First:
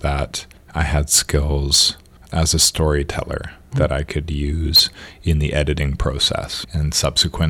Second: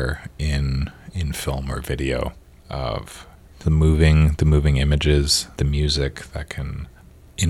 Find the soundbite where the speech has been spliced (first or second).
second